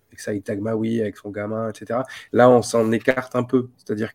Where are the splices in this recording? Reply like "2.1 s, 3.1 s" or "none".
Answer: 2.3 s